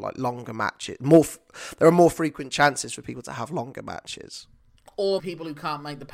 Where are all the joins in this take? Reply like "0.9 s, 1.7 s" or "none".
5.2 s